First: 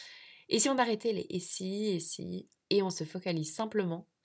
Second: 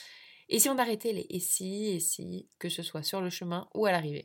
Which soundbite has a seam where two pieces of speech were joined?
second; 1 cut; at 2.5 s

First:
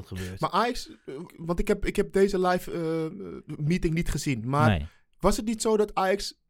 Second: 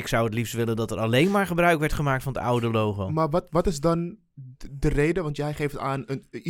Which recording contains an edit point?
first; 1 cut; at 1.3 s

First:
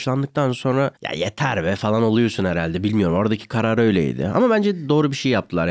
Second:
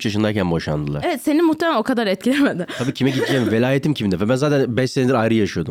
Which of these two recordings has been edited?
first; 1 cut; at 1.0 s

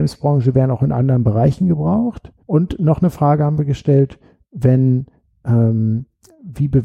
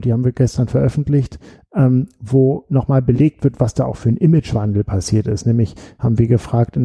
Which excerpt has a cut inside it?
first; 1 cut; at 2.4 s

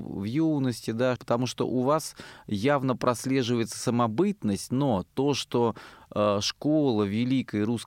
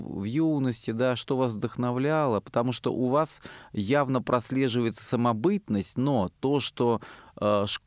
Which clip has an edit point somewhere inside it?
first; 1 cut; at 1.2 s

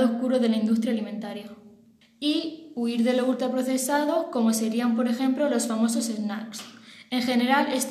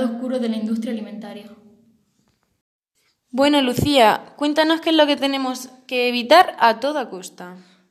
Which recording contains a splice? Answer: first; 1 cut; at 2.0 s

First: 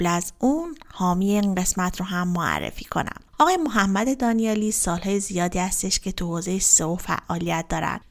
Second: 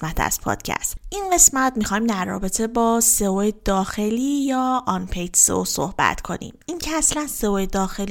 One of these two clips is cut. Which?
first; 1 cut; at 3.3 s

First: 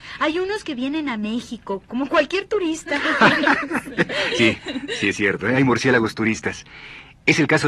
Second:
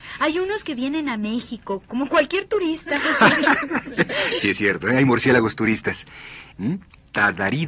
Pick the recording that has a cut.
second; 2 cuts; at 4.4 s, 6.5 s

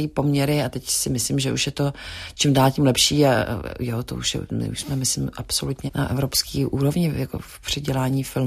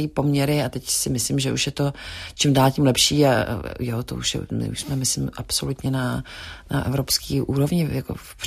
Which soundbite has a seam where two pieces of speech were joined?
first; 1 cut; at 5.9 s

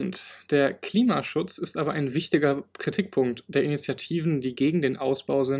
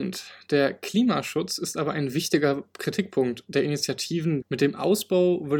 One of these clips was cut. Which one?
second; 1 cut; at 4.4 s

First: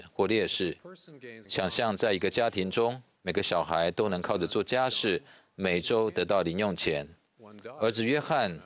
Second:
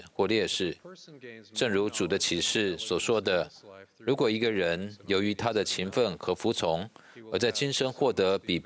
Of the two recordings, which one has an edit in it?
first; 1 cut; at 1.4 s

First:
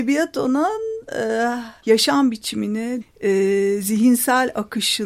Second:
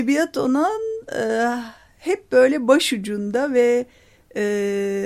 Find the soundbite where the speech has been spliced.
first; 2 cuts; at 1.8 s, 3.0 s

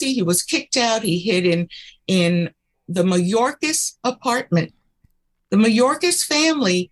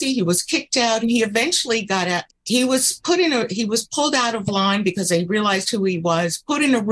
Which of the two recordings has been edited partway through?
second; 2 cuts; at 1.0 s, 2.3 s

